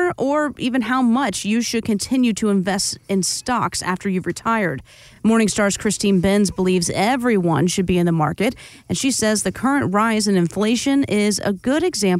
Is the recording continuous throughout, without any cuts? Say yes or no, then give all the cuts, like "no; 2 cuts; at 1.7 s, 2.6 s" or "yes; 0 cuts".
yes; 0 cuts